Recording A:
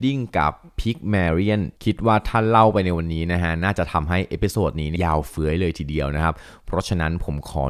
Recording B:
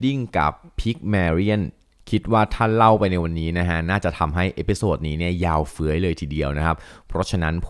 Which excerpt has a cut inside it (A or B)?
A